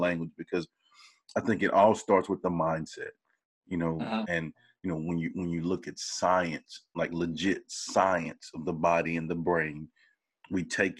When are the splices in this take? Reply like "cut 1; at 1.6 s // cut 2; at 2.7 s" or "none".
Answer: none